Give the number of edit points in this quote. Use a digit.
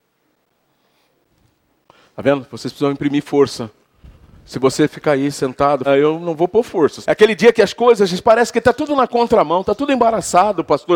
2